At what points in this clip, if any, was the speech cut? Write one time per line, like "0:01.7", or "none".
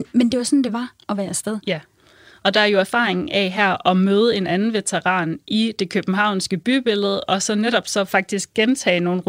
none